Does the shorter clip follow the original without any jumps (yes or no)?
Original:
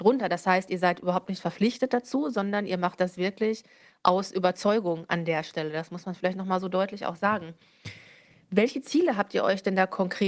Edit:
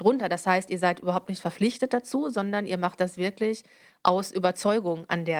yes